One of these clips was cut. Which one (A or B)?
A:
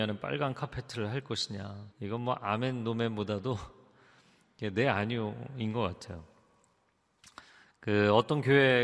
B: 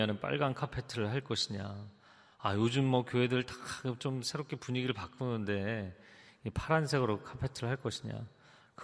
A